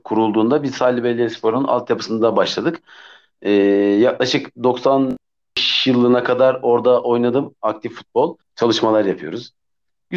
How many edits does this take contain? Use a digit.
1